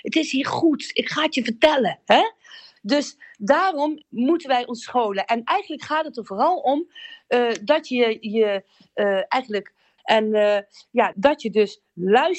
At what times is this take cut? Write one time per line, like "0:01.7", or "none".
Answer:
0:02.8
0:10.0
0:11.1